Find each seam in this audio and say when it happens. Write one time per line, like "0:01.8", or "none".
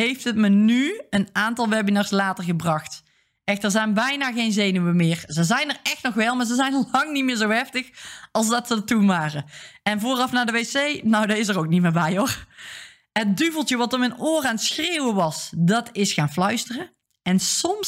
none